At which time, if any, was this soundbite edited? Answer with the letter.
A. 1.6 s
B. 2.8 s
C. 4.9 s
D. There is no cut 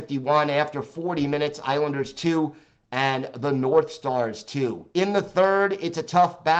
C